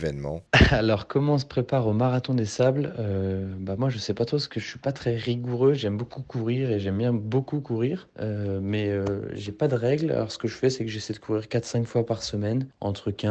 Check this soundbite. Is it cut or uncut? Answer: uncut